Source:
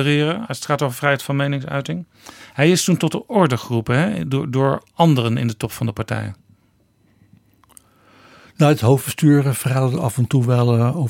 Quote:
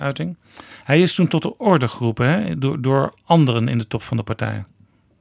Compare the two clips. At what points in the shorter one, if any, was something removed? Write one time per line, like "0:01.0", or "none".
none